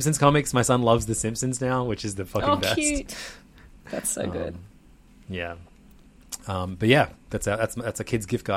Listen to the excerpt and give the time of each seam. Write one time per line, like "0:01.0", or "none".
none